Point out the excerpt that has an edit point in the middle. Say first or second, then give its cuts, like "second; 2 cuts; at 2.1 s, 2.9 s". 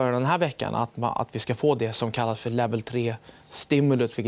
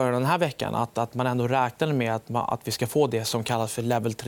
first; 1 cut; at 0.9 s